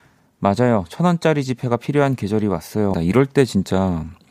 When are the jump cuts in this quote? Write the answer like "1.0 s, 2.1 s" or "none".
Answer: 2.9 s